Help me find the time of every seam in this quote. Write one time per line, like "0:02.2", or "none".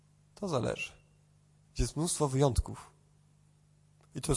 0:01.6